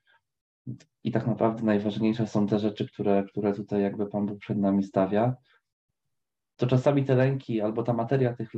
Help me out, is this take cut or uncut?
cut